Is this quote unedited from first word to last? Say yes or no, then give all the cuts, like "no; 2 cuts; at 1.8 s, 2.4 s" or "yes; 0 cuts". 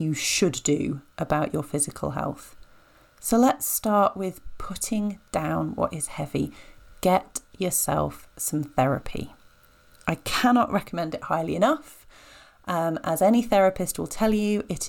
yes; 0 cuts